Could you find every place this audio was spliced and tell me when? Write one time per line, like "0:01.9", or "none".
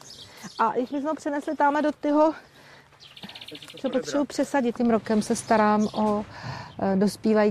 0:04.7